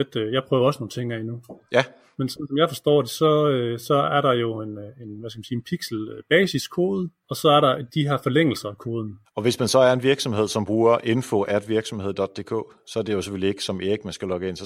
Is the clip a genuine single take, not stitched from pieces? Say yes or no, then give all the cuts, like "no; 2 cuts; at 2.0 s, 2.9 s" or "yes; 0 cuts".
no; 1 cut; at 9.2 s